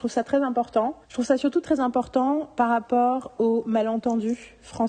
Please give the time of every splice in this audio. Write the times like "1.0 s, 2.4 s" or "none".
1.0 s